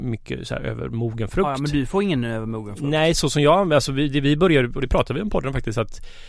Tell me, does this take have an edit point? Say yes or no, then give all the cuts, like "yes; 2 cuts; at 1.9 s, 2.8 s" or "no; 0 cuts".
no; 0 cuts